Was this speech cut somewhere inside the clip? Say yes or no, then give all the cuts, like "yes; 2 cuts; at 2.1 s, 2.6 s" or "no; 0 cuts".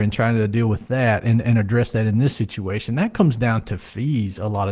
no; 0 cuts